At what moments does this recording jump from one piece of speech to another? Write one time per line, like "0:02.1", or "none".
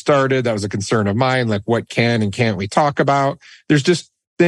none